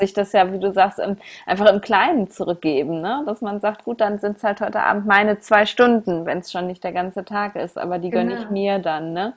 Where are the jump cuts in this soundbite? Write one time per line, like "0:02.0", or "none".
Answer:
none